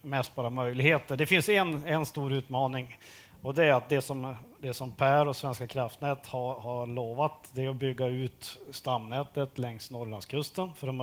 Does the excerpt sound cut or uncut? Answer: uncut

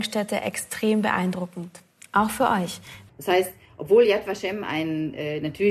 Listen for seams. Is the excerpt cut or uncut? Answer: cut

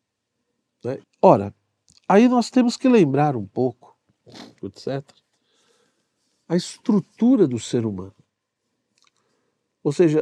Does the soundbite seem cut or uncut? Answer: cut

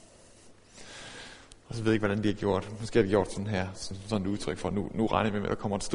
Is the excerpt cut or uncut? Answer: uncut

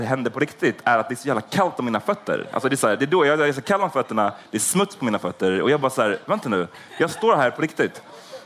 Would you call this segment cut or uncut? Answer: uncut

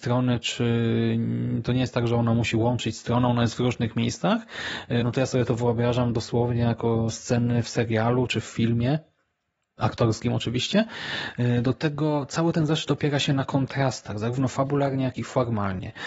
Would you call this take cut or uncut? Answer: cut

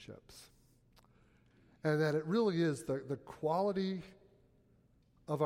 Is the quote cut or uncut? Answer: uncut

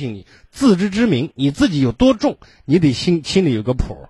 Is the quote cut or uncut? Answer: uncut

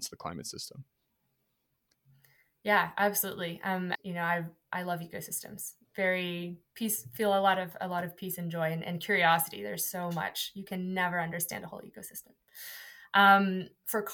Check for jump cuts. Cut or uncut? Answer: cut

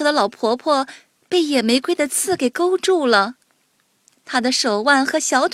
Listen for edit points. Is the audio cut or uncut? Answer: uncut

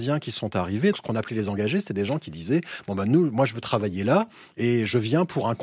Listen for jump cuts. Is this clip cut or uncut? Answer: cut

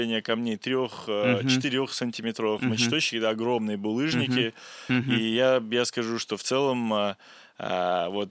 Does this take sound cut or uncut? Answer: uncut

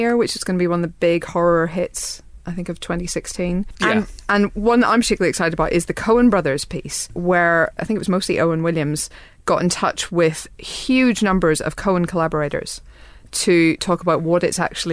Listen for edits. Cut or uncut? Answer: uncut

